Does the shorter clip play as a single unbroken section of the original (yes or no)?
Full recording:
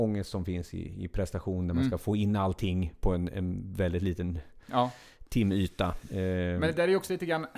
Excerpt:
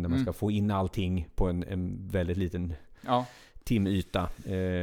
yes